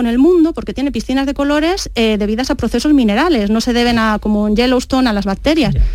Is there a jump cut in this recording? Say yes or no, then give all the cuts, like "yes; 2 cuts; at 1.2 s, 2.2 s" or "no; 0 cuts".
no; 0 cuts